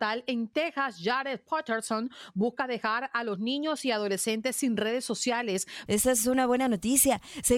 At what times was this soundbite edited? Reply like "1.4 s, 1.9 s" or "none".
5.9 s